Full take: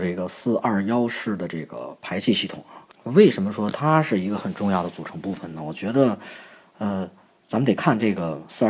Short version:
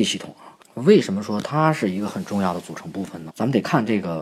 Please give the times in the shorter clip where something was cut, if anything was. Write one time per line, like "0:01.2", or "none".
0:03.3